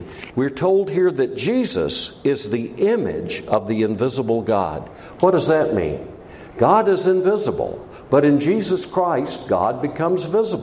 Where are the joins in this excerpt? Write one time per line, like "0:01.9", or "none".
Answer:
none